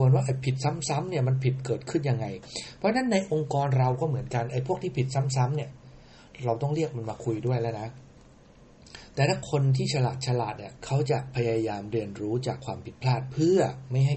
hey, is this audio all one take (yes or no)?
no